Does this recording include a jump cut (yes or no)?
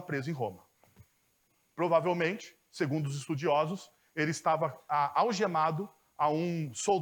no